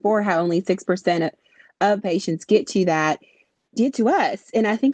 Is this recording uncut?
yes; 0 cuts

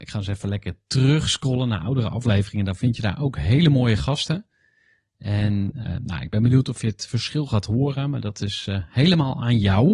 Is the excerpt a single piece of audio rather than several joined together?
yes; 0 cuts

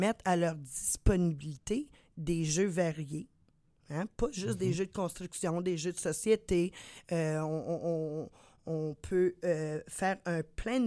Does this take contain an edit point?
no; 0 cuts

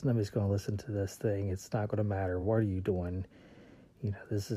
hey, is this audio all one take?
yes; 0 cuts

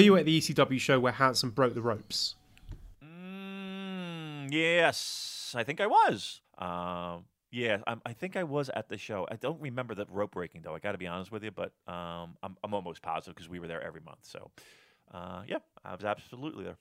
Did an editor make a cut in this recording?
yes; 1 cut; at 6.4 s

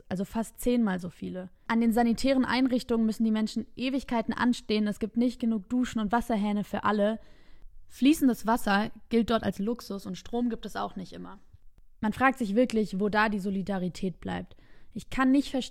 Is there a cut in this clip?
yes; 1 cut; at 1.7 s

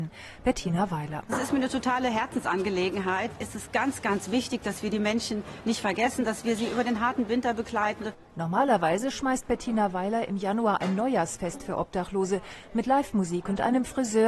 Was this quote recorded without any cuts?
yes; 0 cuts

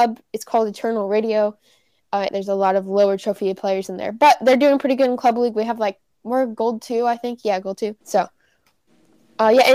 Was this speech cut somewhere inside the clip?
yes; 2 cuts; at 2.3 s, 8.0 s

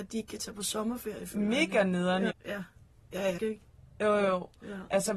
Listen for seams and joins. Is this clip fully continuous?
no; 2 cuts; at 2.3 s, 3.4 s

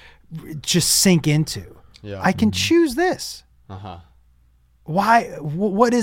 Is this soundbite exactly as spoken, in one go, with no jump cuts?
yes; 0 cuts

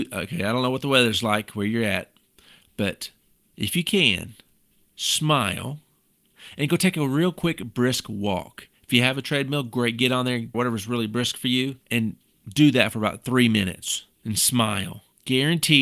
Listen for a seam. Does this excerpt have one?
yes; 2 cuts; at 10.5 s, 11.8 s

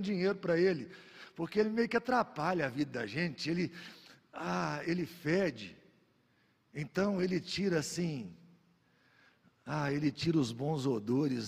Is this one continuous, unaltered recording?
yes; 0 cuts

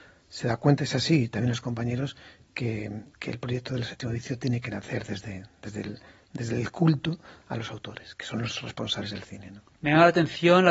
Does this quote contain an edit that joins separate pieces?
no; 0 cuts

